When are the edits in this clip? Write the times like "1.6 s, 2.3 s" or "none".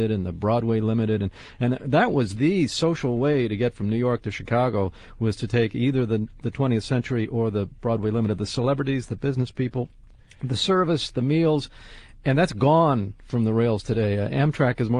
none

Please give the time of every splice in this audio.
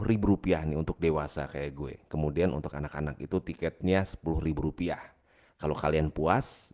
5.4 s

